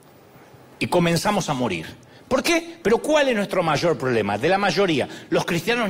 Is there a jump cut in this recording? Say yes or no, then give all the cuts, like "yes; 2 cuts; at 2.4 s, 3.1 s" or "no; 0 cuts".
yes; 1 cut; at 2.8 s